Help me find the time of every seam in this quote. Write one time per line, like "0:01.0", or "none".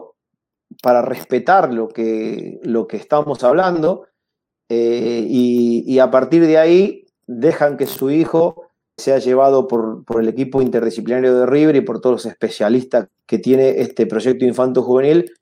0:09.0
0:13.1

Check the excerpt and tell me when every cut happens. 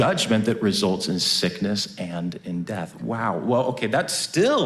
none

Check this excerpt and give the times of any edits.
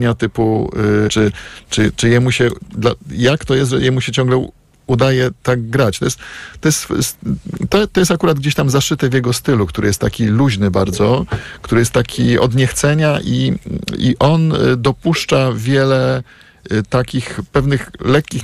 0:01.1

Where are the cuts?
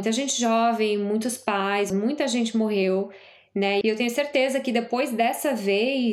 0:01.9
0:03.8

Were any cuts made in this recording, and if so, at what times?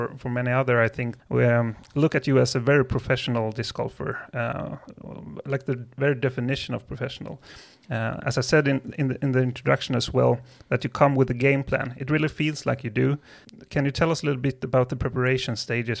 0:01.2

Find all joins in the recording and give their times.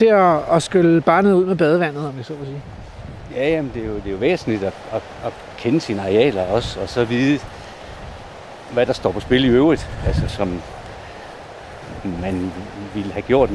0:10.3

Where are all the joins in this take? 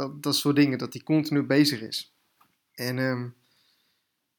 0:02.7

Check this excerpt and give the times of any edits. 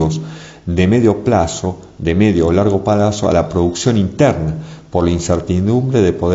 none

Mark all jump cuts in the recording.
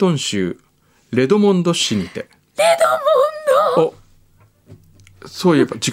none

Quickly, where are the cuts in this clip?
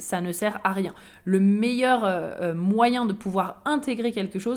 none

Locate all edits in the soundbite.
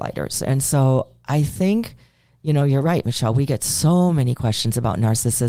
none

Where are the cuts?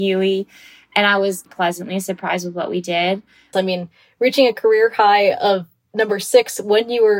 0:01.5
0:03.5

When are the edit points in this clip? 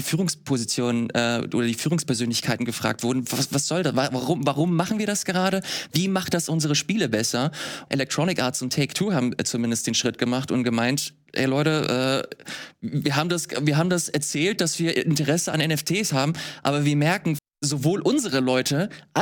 0:07.9
0:17.4

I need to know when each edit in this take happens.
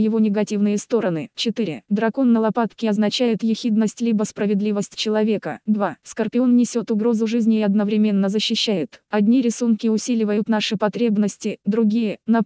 0:01.9
0:09.1

